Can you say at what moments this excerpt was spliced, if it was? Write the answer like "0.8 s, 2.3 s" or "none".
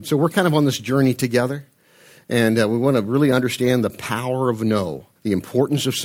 5.2 s